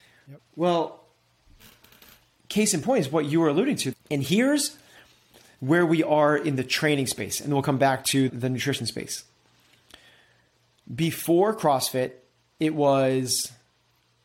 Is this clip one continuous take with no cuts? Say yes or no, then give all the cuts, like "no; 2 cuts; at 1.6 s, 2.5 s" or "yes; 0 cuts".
no; 2 cuts; at 3.9 s, 8.3 s